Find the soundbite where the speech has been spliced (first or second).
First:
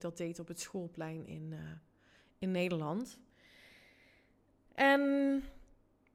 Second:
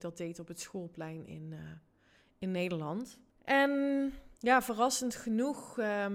second